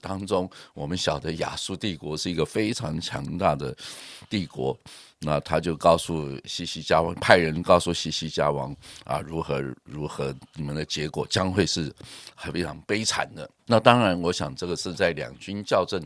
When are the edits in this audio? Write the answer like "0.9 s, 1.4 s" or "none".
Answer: 13.6 s